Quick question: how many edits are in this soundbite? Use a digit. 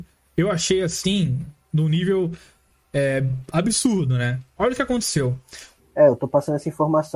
1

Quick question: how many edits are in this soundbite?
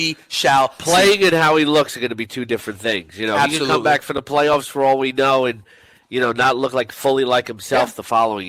0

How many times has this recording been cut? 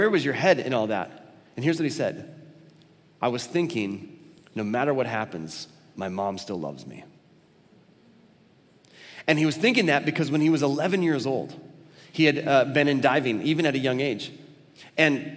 0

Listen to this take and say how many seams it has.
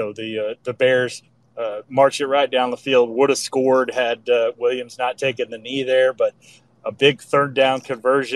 0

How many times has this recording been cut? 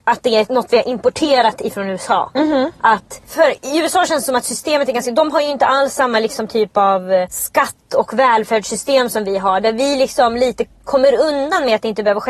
0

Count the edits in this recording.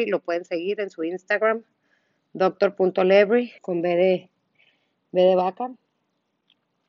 1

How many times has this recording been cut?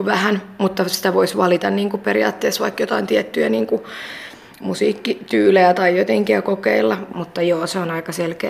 1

